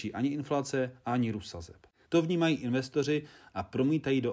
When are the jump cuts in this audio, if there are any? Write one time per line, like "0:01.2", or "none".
0:02.1